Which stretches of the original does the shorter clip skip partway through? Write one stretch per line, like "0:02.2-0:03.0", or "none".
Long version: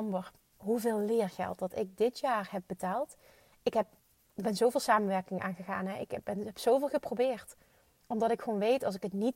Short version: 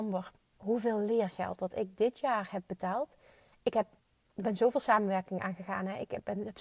none